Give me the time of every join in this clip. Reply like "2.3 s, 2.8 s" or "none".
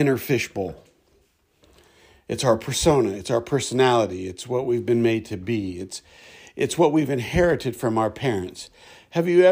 none